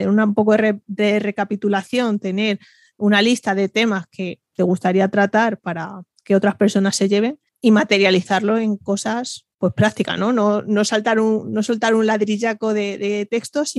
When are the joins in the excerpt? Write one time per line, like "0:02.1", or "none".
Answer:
0:07.5
0:09.5